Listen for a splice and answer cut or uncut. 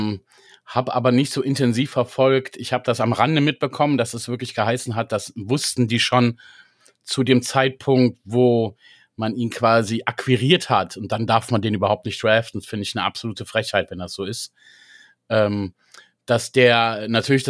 uncut